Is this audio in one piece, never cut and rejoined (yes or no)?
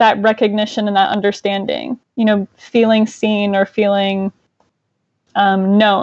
yes